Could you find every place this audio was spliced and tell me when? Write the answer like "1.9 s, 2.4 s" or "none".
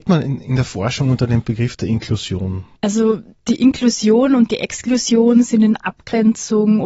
none